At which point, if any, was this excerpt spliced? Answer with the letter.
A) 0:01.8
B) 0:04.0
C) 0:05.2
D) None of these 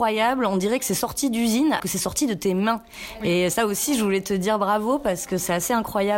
A